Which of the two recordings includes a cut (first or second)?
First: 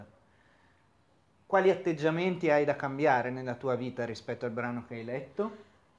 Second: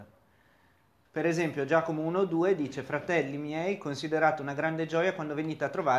second